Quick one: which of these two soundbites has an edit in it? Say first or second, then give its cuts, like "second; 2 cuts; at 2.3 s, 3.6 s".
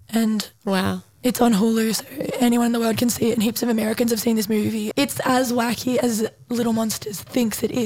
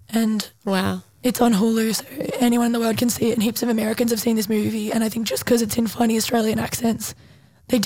first; 1 cut; at 4.9 s